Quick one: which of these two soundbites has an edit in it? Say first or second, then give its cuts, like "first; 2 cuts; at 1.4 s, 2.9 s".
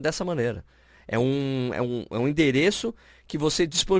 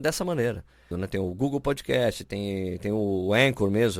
second; 1 cut; at 0.9 s